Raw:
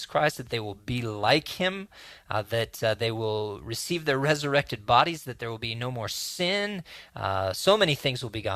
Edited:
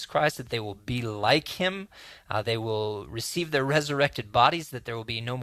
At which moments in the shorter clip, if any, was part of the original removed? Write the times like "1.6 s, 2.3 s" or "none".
2.4 s